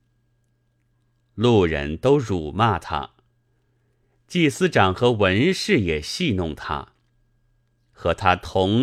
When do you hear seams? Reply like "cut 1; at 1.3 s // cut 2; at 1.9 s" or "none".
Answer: none

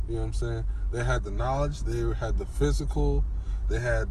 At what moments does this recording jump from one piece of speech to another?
none

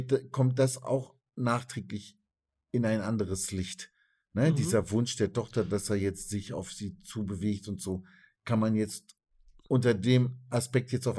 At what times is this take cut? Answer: none

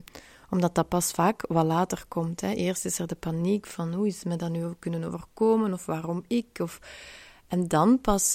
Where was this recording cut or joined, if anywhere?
none

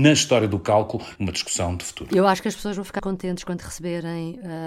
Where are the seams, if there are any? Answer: cut 1; at 1.2 s // cut 2; at 3.0 s

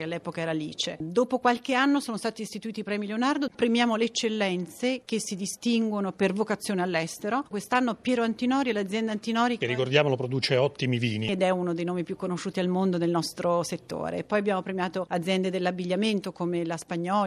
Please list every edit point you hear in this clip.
none

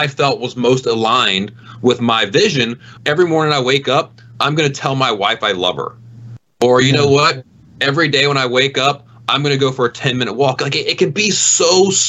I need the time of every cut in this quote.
cut 1; at 3.0 s

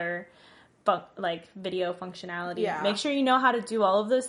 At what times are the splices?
none

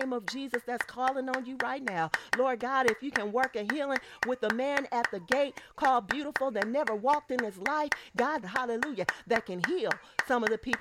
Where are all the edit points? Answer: cut 1; at 2.3 s // cut 2; at 8.4 s

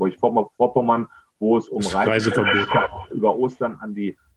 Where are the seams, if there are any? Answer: cut 1; at 3.1 s

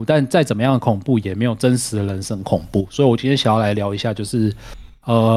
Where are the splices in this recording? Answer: none

